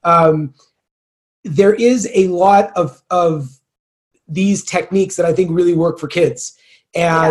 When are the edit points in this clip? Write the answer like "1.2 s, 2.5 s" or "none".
none